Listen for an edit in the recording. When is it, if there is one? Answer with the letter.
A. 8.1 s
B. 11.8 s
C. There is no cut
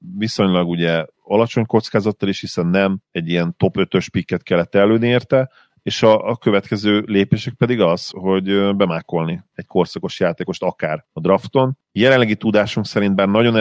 A